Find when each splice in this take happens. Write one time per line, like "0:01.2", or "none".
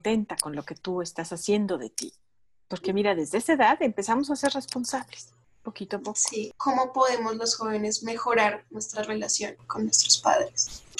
none